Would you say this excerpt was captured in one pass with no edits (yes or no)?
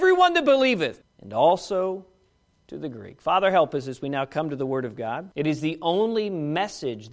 no